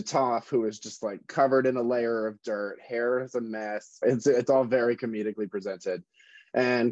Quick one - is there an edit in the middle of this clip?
yes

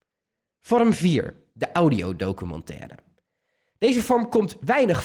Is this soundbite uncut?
yes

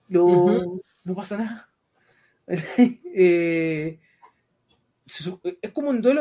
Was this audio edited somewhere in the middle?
no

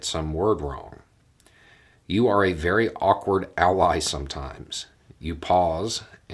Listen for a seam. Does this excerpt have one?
no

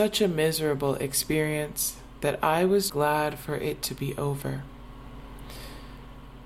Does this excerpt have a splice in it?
yes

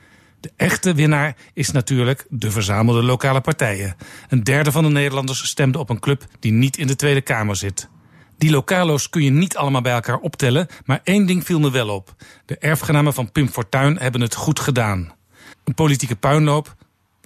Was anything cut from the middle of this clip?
yes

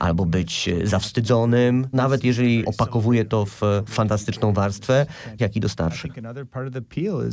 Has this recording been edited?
yes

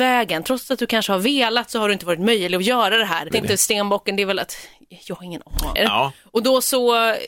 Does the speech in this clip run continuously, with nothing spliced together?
no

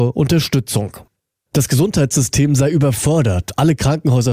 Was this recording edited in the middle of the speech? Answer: yes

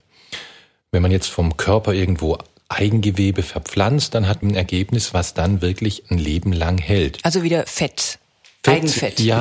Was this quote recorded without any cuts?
no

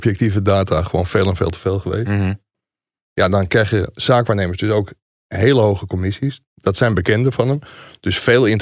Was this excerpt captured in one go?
yes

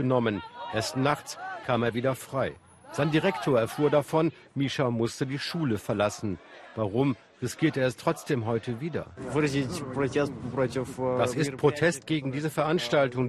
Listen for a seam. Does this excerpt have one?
no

